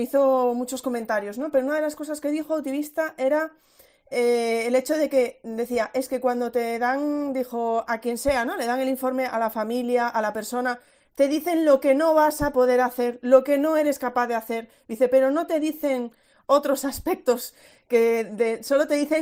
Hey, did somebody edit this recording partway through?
yes; 1 cut; at 7.9 s

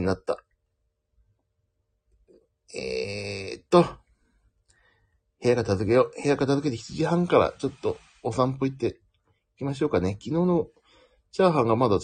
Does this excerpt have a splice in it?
no; 0 cuts

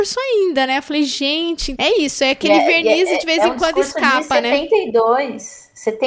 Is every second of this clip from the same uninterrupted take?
no; 1 cut; at 1.7 s

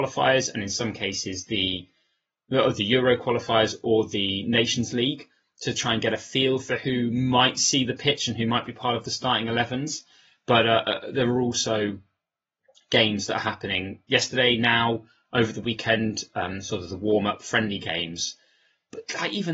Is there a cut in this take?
no; 0 cuts

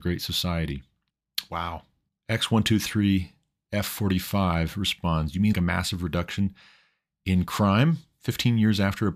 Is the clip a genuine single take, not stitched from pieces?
no; 2 cuts; at 2.2 s, 5.5 s

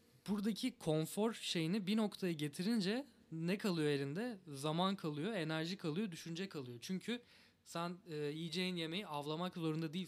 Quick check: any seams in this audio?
no; 0 cuts

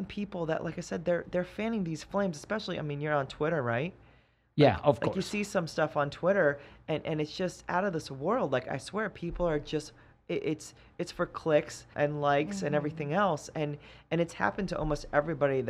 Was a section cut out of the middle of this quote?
yes; 1 cut; at 11.9 s

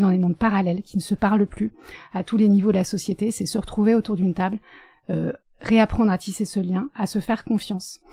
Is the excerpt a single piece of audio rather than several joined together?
yes; 0 cuts

